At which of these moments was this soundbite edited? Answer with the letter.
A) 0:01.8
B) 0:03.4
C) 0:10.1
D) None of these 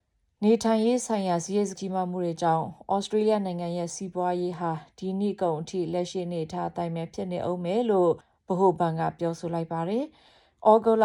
A